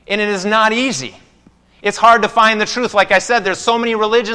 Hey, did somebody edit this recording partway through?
no; 0 cuts

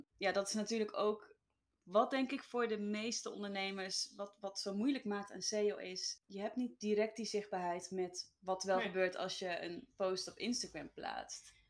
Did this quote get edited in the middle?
no; 0 cuts

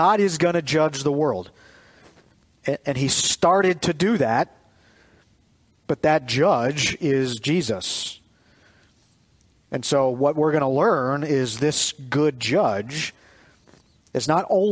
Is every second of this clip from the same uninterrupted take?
yes; 0 cuts

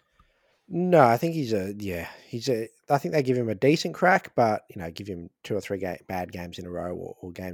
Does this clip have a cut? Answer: no; 0 cuts

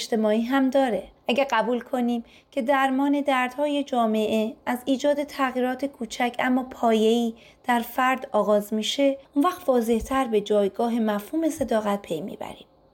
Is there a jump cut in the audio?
yes; 2 cuts; at 1.2 s, 9.2 s

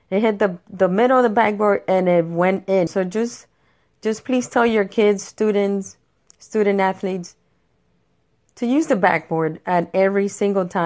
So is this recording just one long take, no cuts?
no; 1 cut; at 2.9 s

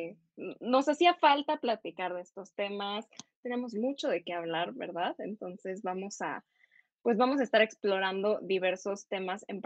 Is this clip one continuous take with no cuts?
yes; 0 cuts

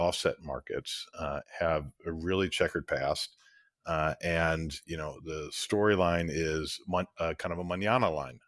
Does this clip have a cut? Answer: no; 0 cuts

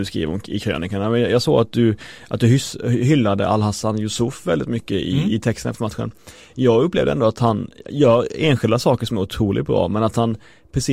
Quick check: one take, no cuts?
yes; 0 cuts

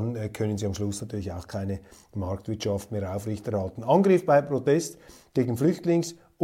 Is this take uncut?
yes; 0 cuts

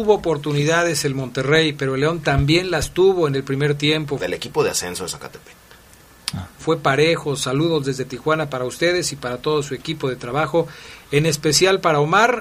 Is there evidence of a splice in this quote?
yes; 2 cuts; at 4.2 s, 6.6 s

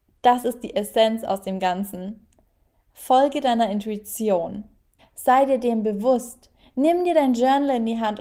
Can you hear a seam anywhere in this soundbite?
yes; 1 cut; at 5.0 s

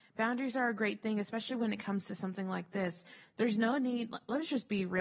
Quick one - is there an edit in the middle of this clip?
no; 0 cuts

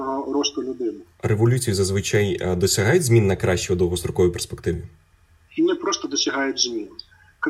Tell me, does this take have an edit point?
yes; 1 cut; at 1.1 s

